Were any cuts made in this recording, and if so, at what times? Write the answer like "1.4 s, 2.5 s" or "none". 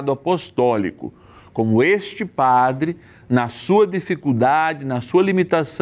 none